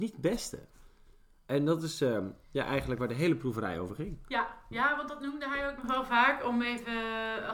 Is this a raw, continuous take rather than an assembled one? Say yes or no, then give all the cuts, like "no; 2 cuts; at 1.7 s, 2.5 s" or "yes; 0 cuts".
yes; 0 cuts